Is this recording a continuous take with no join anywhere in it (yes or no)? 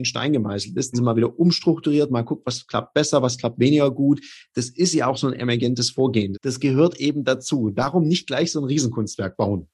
no